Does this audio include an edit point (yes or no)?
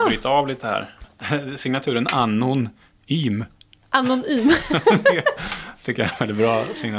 no